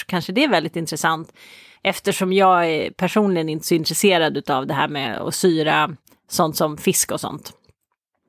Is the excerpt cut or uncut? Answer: cut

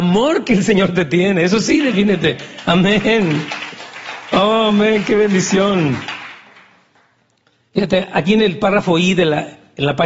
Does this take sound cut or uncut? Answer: uncut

